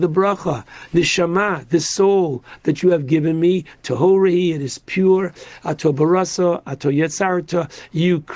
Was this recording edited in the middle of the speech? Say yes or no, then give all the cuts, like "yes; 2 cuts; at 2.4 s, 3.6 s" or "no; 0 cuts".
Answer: no; 0 cuts